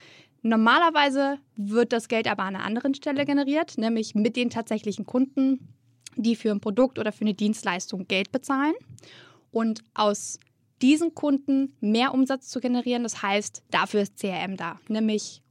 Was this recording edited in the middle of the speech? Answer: yes; 1 cut; at 13.7 s

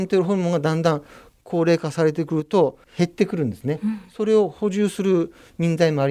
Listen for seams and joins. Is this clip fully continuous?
yes; 0 cuts

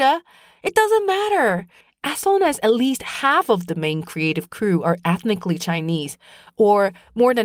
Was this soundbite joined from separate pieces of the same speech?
no; 0 cuts

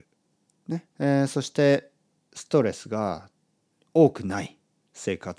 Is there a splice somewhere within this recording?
yes; 1 cut; at 0.9 s

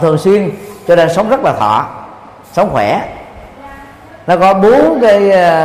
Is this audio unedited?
yes; 0 cuts

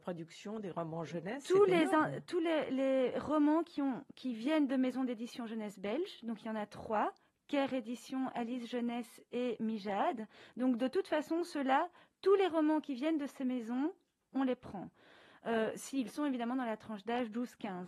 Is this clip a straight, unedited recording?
yes; 0 cuts

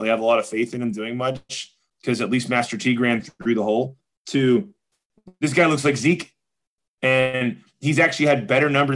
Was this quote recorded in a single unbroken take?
yes; 0 cuts

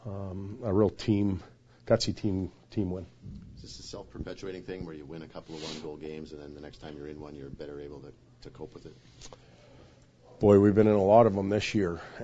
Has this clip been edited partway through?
no; 0 cuts

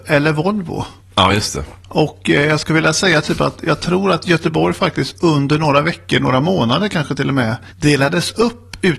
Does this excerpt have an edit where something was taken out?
no; 0 cuts

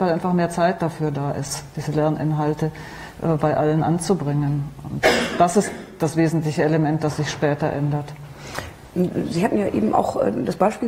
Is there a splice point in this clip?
no; 0 cuts

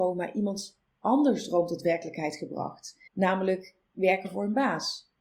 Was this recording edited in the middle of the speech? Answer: yes; 1 cut; at 3.1 s

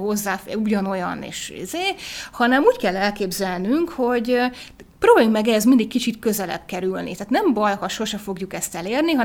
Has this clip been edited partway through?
no; 0 cuts

